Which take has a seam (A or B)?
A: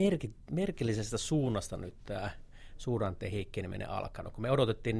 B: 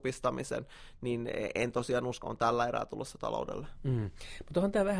B